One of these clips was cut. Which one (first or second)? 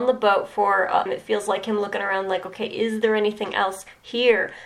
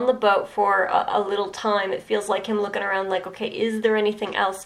first